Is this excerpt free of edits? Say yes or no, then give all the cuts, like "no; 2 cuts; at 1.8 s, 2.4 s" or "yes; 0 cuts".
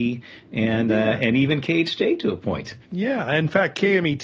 no; 1 cut; at 2.8 s